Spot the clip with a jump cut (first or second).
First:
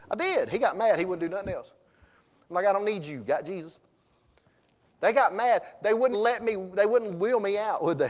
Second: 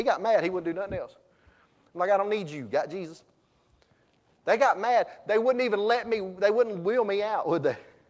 first